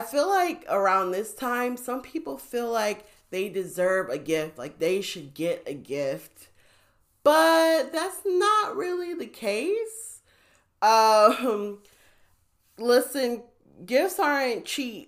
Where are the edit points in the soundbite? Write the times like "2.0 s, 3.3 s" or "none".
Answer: none